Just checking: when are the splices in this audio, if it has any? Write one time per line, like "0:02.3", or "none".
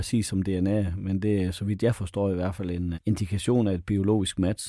0:02.9